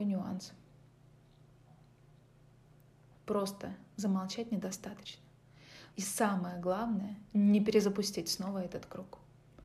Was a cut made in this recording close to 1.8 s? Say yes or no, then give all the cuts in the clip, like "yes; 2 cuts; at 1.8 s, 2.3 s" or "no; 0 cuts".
no; 2 cuts; at 3.1 s, 5.9 s